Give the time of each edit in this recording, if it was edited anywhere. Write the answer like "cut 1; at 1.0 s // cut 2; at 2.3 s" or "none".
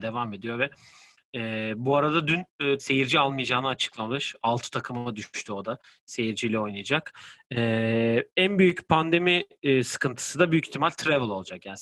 cut 1; at 2.8 s